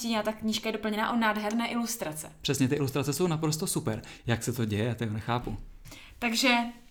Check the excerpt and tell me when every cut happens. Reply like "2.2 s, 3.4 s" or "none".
4.2 s